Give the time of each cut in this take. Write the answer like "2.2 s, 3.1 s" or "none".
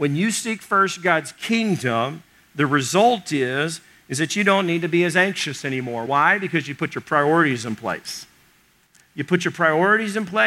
none